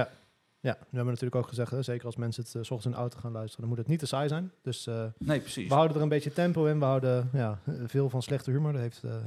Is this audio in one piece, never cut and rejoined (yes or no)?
yes